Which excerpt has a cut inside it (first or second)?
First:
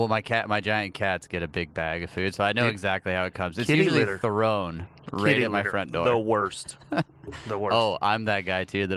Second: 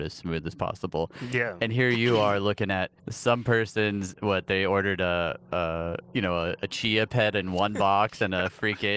second